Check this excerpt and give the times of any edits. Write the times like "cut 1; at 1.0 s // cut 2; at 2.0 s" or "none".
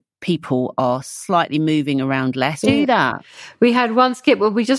cut 1; at 2.6 s